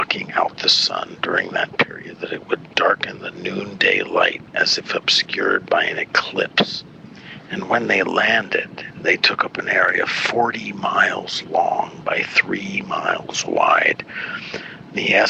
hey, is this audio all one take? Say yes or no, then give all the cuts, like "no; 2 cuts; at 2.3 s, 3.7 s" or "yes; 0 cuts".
no; 1 cut; at 2.2 s